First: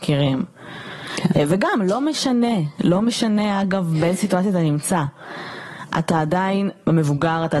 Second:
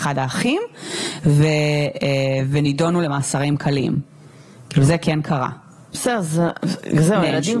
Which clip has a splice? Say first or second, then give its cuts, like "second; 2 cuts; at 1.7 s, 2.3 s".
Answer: second; 1 cut; at 5.9 s